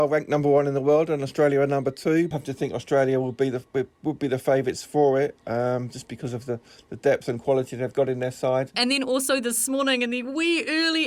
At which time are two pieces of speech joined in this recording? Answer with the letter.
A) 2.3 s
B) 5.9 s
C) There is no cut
A